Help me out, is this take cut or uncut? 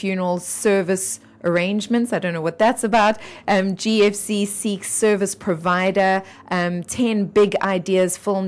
uncut